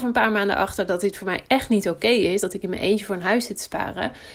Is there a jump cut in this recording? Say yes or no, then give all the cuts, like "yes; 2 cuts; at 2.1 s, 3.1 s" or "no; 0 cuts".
no; 0 cuts